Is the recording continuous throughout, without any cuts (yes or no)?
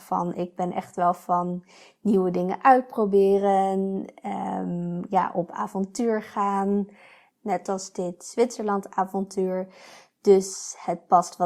yes